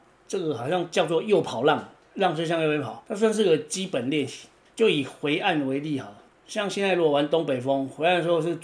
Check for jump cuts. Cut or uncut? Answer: cut